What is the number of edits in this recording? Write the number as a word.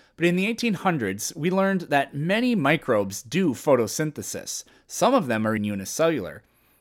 one